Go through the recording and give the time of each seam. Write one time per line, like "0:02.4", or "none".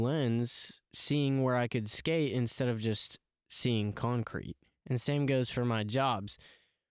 none